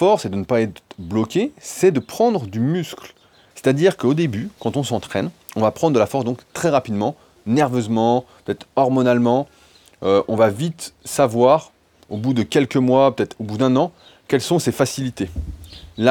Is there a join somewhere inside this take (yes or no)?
yes